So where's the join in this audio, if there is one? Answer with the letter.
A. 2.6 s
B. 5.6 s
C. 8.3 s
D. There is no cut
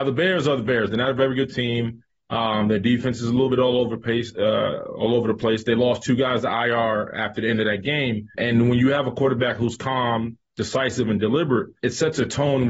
C